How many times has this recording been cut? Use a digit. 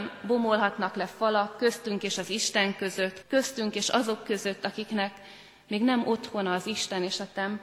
1